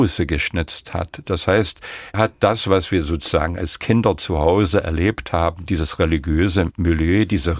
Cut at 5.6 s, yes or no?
no